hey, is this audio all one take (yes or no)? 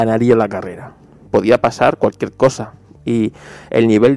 no